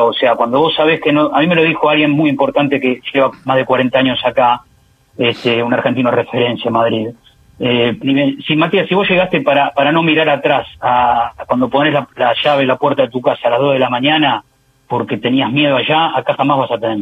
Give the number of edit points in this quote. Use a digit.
1